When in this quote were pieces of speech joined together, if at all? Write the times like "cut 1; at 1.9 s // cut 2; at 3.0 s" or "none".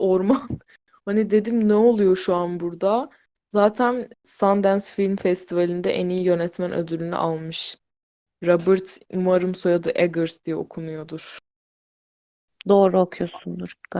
cut 1; at 4.1 s